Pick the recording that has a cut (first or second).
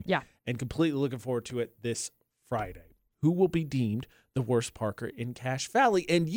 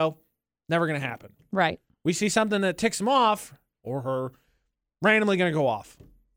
first